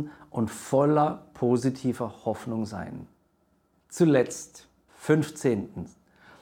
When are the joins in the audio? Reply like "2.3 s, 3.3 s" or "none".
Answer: 4.9 s